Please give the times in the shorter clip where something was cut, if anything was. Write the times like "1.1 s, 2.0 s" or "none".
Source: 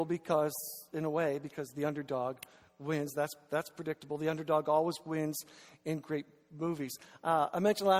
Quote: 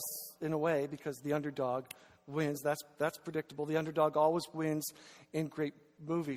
none